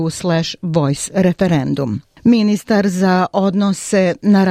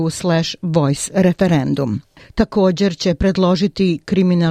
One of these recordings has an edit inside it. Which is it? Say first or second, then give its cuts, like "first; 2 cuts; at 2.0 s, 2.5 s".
second; 1 cut; at 2.2 s